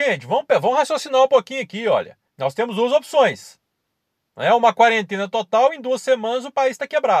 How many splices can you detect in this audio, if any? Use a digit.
1